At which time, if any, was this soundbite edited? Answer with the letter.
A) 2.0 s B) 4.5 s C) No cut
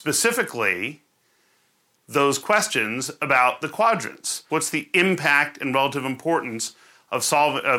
B